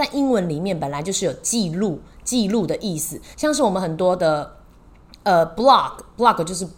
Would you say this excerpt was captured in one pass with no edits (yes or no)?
yes